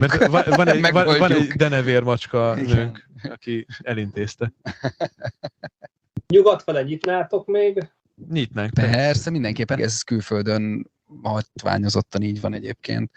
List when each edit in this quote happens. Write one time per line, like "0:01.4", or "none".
0:09.8